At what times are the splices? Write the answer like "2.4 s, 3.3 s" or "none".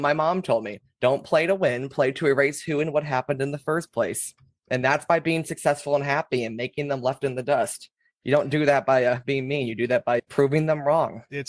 none